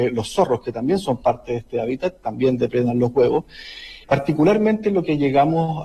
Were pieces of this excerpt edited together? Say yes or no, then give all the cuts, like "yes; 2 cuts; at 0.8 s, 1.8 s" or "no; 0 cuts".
yes; 1 cut; at 4.0 s